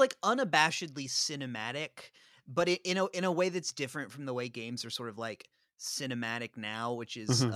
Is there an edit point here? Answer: no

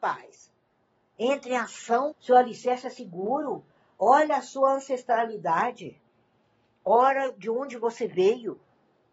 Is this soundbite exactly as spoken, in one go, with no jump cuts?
no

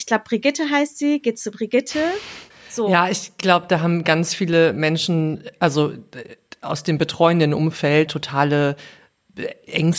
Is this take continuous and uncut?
no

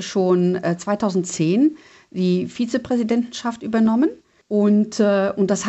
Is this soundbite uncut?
no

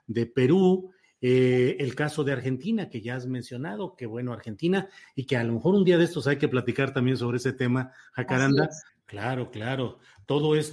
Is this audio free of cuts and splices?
no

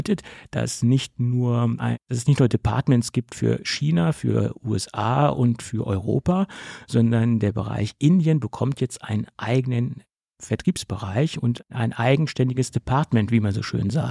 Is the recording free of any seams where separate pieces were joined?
yes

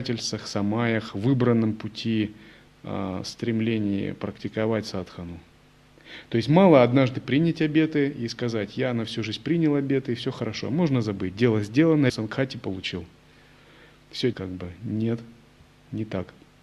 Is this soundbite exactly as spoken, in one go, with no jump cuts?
no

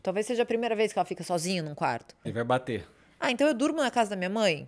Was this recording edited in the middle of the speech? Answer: yes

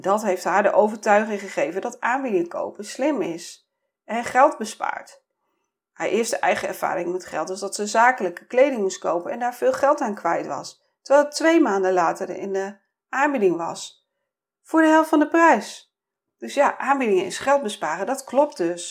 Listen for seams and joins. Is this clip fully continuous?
yes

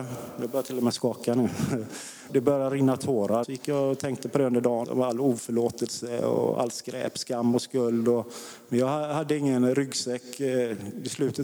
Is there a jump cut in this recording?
yes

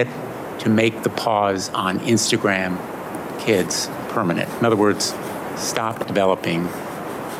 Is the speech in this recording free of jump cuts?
yes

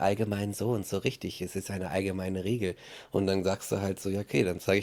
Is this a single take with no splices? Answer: yes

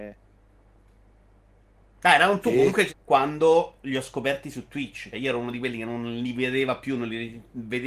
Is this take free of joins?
no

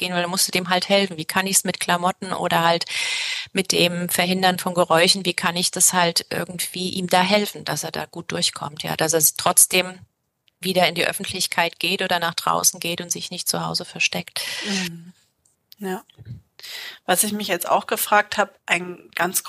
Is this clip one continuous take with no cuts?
yes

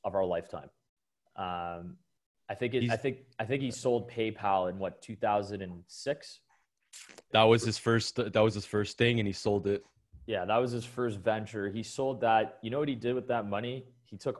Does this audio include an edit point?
yes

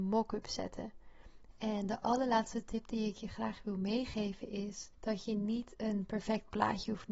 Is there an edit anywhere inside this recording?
yes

